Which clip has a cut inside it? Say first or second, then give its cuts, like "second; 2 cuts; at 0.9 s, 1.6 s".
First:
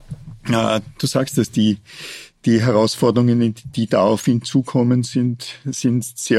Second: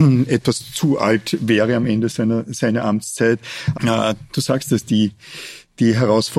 second; 1 cut; at 3.7 s